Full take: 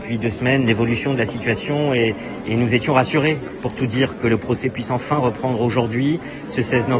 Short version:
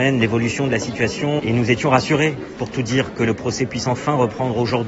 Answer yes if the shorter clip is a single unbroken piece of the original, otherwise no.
no